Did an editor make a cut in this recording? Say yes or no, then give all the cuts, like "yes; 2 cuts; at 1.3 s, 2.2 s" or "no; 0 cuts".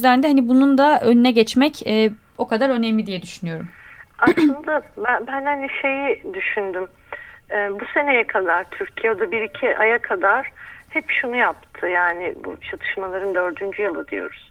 no; 0 cuts